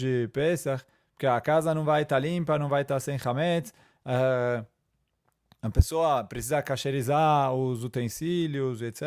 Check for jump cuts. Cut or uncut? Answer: uncut